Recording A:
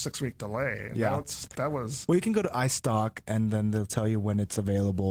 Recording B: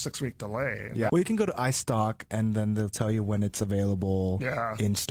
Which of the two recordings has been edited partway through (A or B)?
B